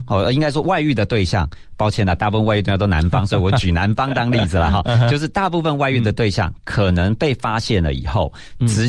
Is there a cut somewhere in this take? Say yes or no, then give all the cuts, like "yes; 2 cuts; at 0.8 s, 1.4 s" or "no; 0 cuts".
no; 0 cuts